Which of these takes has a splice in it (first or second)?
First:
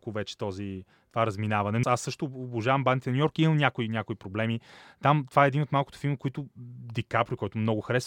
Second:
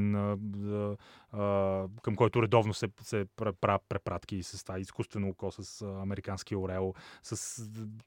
first